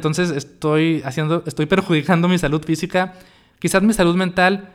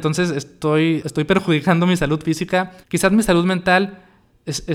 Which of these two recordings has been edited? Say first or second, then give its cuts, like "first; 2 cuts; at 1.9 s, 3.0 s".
second; 2 cuts; at 1.0 s, 2.8 s